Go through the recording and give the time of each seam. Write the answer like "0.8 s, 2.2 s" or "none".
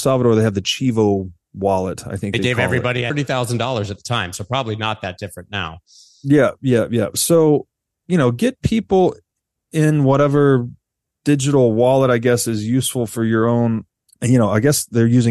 3.1 s